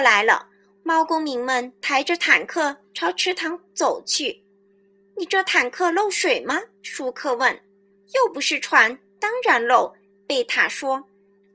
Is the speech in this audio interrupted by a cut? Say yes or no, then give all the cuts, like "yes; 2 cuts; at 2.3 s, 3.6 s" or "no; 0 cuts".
no; 0 cuts